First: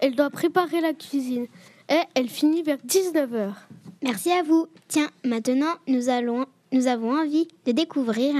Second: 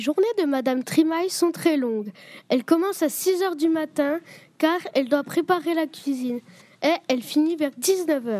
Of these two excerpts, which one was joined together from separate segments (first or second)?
first